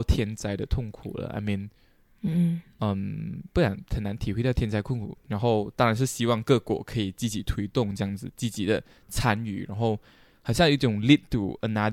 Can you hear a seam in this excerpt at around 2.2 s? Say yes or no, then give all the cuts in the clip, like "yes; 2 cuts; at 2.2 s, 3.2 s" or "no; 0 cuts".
no; 1 cut; at 5.1 s